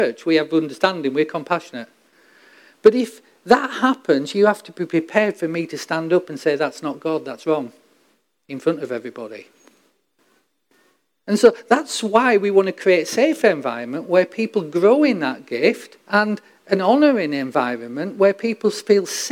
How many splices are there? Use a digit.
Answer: 2